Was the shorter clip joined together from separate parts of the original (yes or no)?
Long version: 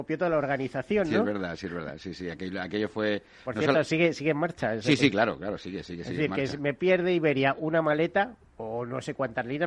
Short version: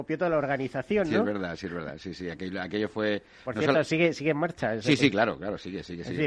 no